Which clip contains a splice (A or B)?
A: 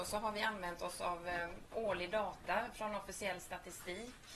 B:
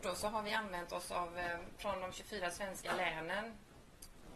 B